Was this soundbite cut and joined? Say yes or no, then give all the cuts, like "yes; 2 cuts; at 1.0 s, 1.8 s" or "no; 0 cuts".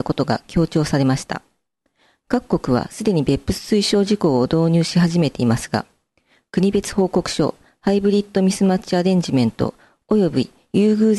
no; 0 cuts